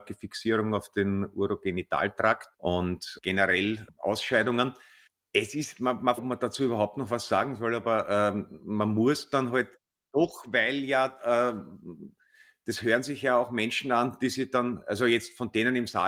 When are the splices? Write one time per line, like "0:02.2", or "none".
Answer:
0:02.5
0:06.2

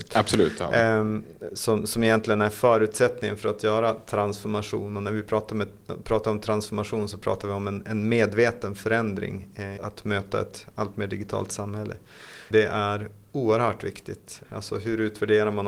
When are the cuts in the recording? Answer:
0:09.8
0:12.5
0:14.4

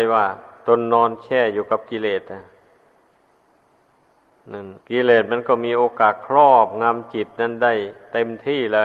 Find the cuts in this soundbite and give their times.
0:04.8

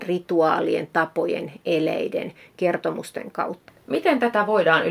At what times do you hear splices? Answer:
0:03.7

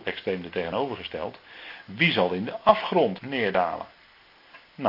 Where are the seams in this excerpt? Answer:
0:03.2

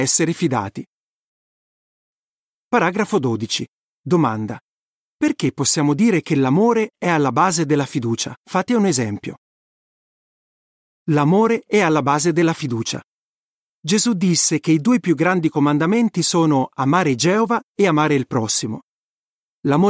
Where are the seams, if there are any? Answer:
0:08.4

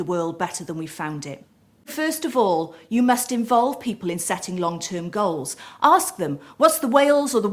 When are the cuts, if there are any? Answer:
none

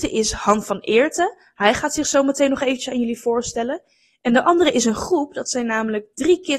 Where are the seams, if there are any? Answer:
none

